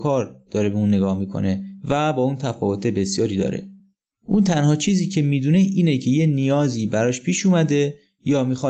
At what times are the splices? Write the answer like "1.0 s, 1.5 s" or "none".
none